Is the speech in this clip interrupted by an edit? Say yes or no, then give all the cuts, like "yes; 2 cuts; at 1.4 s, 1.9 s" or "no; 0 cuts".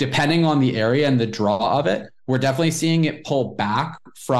no; 0 cuts